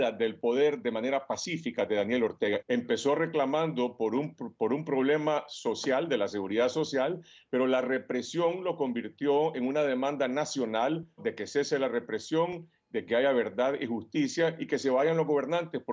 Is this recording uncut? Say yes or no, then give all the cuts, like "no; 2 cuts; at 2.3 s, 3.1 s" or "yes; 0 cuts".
no; 2 cuts; at 2.6 s, 11.2 s